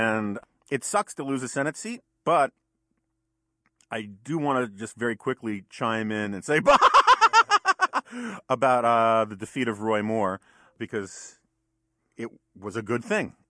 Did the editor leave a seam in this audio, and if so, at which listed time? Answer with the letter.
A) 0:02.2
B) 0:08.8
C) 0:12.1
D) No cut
A